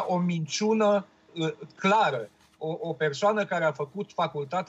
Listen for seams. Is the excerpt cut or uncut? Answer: cut